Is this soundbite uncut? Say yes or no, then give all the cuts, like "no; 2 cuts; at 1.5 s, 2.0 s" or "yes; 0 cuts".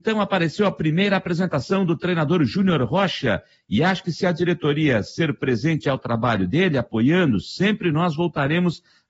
yes; 0 cuts